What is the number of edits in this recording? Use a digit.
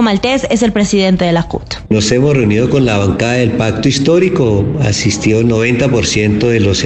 0